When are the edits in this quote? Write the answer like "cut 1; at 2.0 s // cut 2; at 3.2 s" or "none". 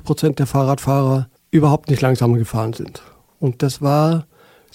none